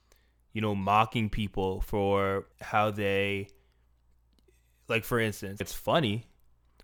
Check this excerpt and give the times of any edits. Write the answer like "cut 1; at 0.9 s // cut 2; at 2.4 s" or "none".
cut 1; at 2.5 s // cut 2; at 5.6 s